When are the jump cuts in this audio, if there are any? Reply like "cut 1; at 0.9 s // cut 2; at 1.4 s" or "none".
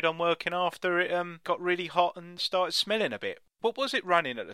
none